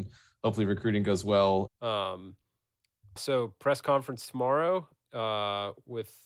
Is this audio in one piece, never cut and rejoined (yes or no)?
no